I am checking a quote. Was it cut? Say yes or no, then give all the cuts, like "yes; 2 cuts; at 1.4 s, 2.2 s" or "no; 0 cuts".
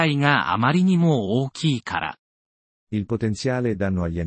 yes; 1 cut; at 2.7 s